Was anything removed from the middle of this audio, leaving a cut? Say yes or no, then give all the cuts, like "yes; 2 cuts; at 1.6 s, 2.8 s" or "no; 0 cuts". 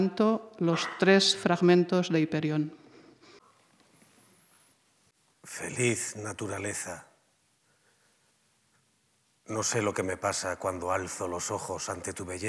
no; 0 cuts